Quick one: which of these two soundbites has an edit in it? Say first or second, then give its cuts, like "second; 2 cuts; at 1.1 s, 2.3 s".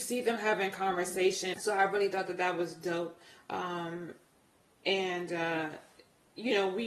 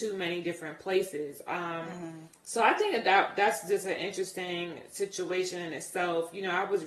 first; 1 cut; at 1.5 s